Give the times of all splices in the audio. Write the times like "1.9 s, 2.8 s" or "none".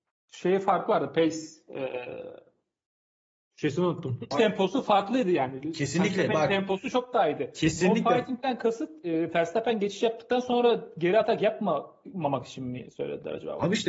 4.3 s